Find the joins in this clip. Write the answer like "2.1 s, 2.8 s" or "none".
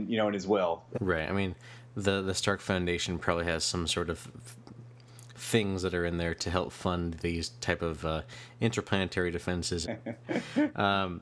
0.9 s, 9.8 s